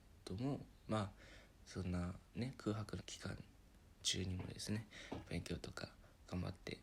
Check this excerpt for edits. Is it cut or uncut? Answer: cut